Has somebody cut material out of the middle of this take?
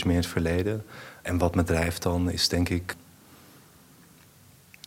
no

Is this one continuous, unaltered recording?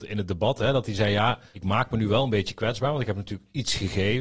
yes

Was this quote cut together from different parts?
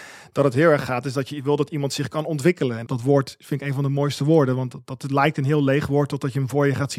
yes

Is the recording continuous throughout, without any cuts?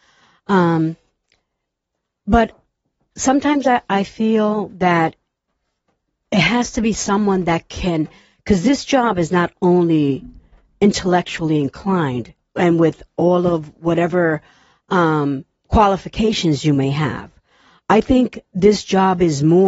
yes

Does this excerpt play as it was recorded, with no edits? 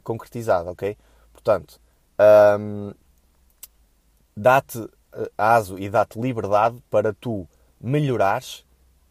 yes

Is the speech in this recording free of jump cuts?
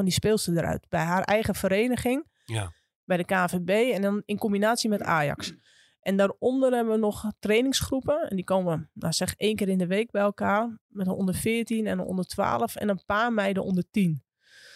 yes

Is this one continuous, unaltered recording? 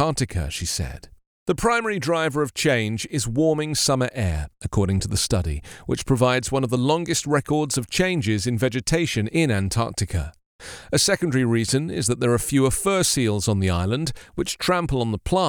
yes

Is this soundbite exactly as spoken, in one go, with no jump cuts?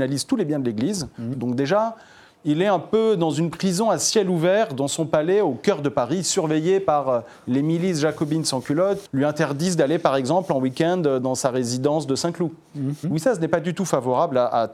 no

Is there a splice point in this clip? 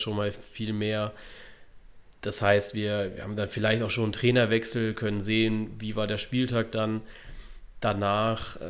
no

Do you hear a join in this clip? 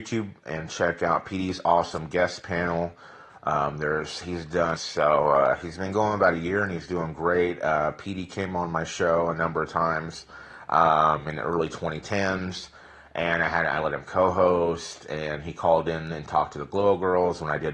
yes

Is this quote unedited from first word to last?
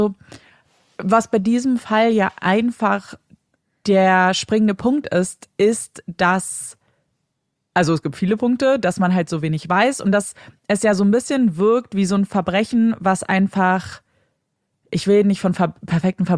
yes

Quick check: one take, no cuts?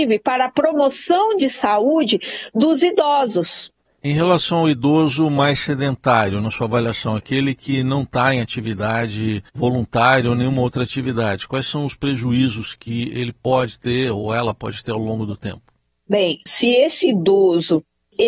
no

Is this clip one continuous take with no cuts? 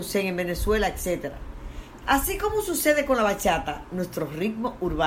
no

